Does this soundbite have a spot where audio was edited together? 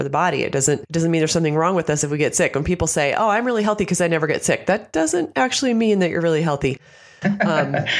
no; 0 cuts

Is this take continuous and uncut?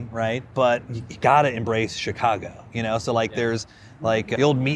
yes; 0 cuts

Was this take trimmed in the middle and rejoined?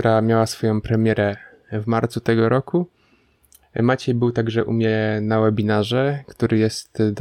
no; 0 cuts

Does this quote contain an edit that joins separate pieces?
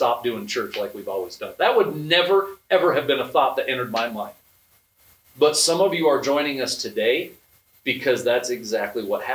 no; 0 cuts

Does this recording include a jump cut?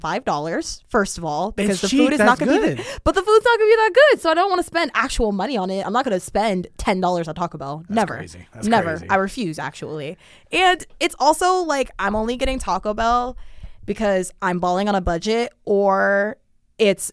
no; 0 cuts

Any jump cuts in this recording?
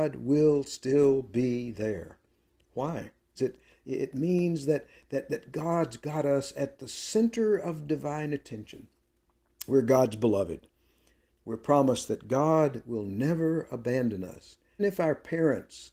yes; 3 cuts; at 3.4 s, 11.3 s, 14.8 s

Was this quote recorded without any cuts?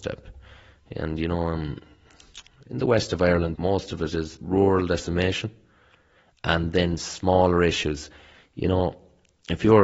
no; 2 cuts; at 3.5 s, 8.3 s

